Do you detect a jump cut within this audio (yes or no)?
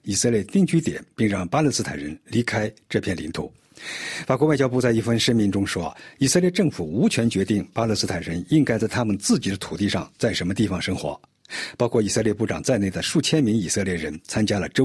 no